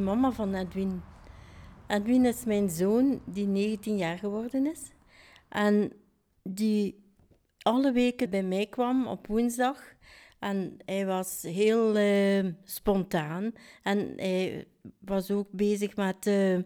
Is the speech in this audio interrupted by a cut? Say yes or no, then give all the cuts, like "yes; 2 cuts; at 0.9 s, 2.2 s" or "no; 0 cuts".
yes; 1 cut; at 8.3 s